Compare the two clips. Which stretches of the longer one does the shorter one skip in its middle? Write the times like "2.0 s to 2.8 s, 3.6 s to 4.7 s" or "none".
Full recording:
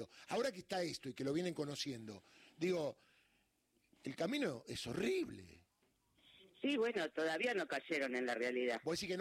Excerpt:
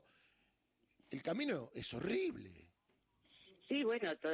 none